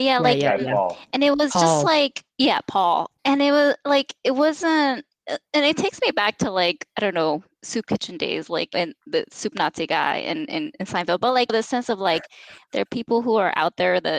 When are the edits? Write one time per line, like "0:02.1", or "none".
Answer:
none